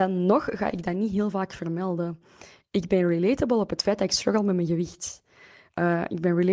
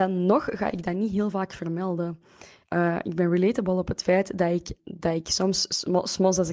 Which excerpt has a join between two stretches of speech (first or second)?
second